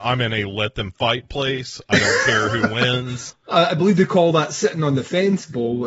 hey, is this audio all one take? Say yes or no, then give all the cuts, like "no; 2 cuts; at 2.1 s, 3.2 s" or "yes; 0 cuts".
yes; 0 cuts